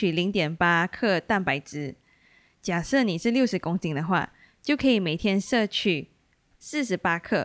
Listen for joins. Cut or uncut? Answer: uncut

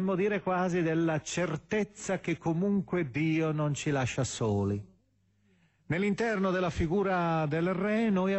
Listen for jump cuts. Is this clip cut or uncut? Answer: uncut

